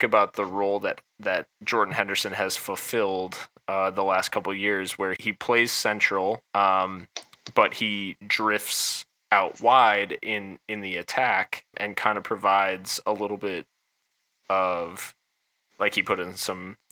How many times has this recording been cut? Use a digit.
3